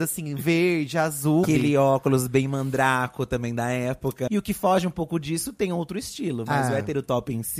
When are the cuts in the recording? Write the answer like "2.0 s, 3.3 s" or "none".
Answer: 1.4 s, 4.3 s